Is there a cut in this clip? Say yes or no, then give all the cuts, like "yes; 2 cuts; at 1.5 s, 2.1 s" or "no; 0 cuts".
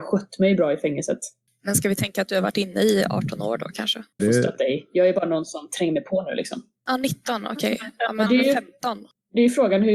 yes; 2 cuts; at 4.2 s, 6.8 s